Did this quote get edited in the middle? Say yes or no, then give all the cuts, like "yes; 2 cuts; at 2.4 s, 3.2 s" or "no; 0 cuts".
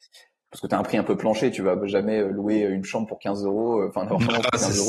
no; 0 cuts